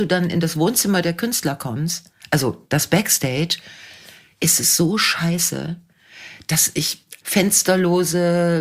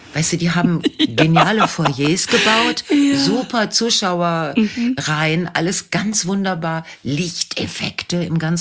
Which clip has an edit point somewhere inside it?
first; 1 cut; at 7.2 s

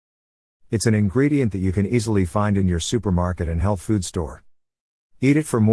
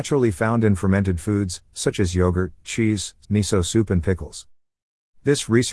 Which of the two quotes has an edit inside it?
second; 1 cut; at 3.2 s

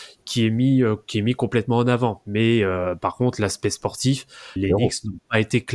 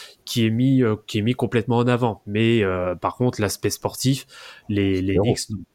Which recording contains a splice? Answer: first; 1 cut; at 4.6 s

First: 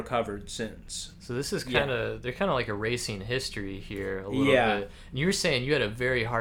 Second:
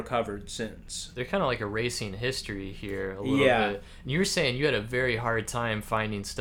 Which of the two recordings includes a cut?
second; 1 cut; at 1.1 s

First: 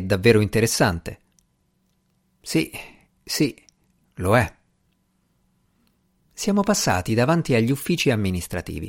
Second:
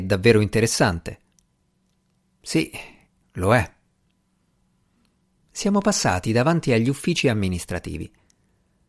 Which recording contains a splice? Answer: second; 1 cut; at 3.2 s

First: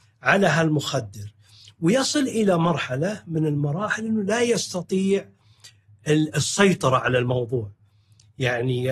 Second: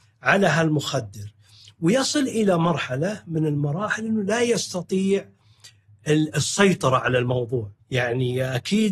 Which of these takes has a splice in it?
second; 1 cut; at 7.8 s

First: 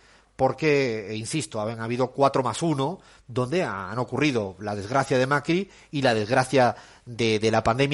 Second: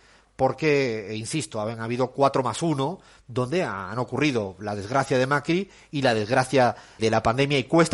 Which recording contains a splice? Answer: second; 1 cut; at 7.0 s

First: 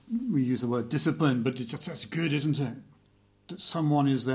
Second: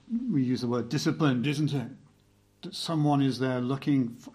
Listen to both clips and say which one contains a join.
second; 1 cut; at 1.4 s

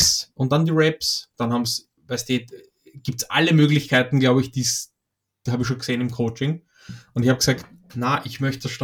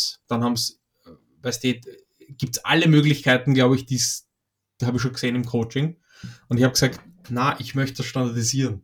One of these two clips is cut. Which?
first; 1 cut; at 2.0 s

